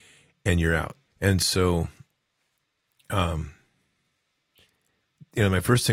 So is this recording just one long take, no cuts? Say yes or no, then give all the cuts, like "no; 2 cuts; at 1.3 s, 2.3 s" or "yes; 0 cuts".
no; 1 cut; at 1.1 s